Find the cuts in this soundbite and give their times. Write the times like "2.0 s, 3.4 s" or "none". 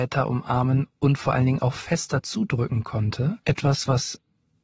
3.4 s